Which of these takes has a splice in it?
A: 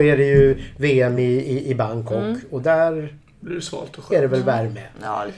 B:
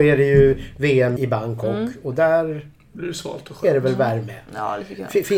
B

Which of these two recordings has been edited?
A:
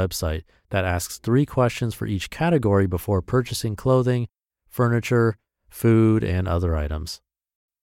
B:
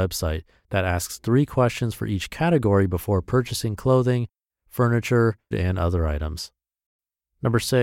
B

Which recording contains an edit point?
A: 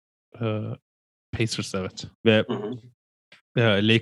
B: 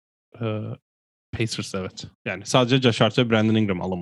A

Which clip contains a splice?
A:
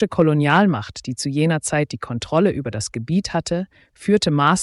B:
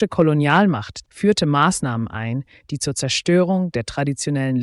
B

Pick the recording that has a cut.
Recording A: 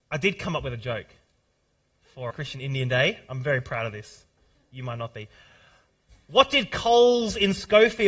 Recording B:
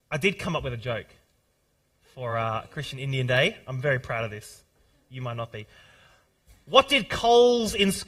A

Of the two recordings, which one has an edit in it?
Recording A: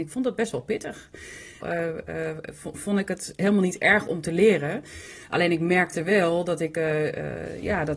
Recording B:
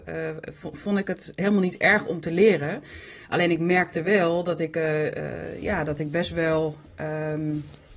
A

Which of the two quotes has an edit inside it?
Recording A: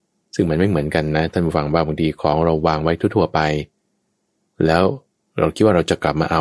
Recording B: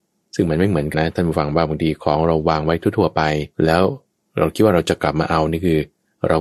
B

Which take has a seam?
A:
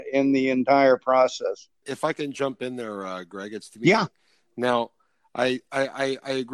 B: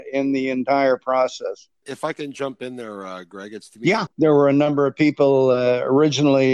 B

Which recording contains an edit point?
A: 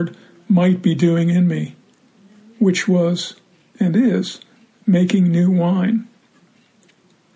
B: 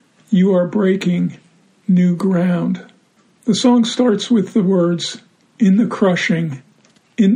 B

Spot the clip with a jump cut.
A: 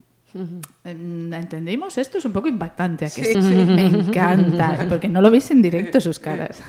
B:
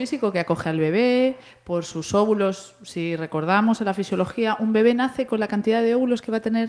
A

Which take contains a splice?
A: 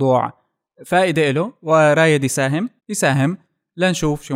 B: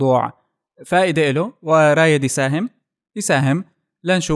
A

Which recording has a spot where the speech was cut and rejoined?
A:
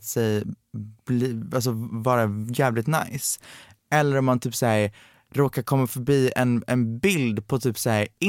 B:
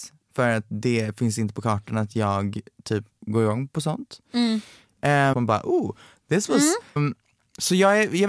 B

